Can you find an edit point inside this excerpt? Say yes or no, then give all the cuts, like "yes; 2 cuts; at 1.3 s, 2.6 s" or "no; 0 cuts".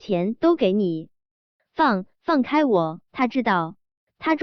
yes; 2 cuts; at 1.5 s, 3.1 s